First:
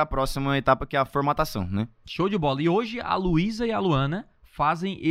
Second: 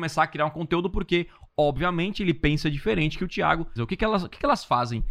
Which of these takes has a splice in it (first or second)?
second